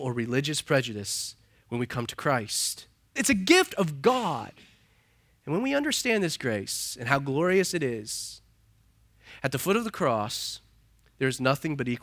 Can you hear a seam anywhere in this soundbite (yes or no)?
yes